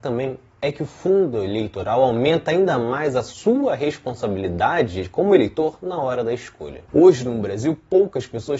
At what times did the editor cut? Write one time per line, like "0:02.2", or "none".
none